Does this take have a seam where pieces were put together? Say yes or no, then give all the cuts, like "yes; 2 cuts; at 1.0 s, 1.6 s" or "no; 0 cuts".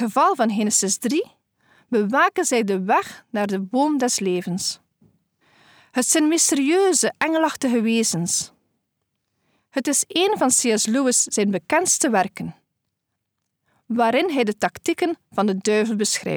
yes; 1 cut; at 9.6 s